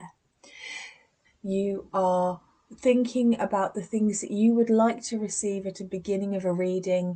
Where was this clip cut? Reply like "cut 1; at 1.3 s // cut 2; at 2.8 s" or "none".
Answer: cut 1; at 1.2 s